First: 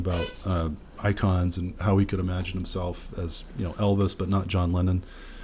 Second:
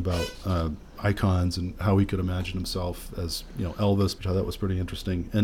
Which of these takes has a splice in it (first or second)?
second